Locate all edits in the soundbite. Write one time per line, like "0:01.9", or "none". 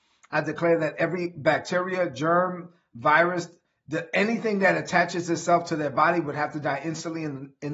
none